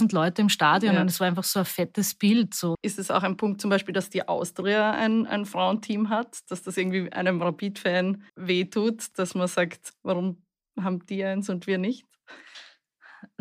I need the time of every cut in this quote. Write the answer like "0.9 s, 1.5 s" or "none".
2.7 s, 8.3 s